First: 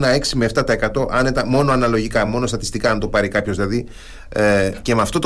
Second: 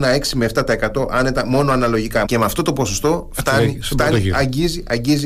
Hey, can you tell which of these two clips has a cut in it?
second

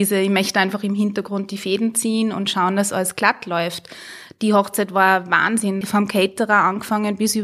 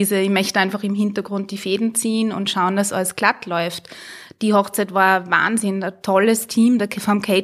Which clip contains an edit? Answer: first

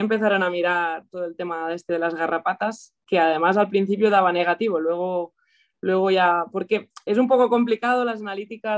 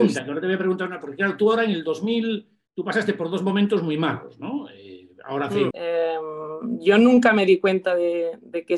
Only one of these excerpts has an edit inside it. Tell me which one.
second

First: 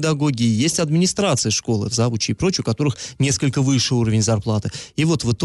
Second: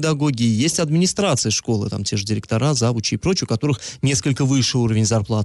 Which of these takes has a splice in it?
first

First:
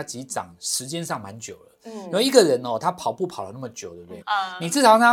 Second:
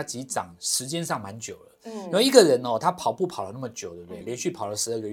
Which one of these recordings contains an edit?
first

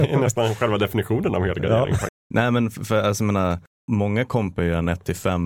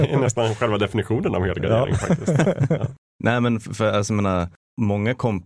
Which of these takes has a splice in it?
first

